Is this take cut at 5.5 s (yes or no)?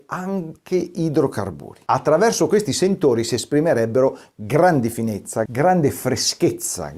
yes